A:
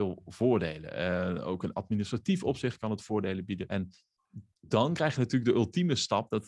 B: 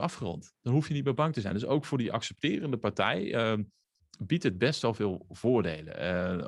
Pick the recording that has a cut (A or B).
A